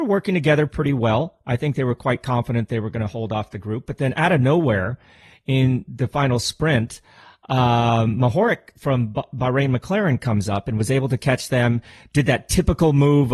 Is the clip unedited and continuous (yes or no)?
yes